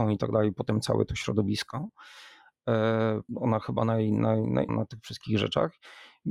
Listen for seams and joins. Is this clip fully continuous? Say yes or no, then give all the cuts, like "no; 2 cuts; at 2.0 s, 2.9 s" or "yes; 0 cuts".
no; 2 cuts; at 3.3 s, 4.7 s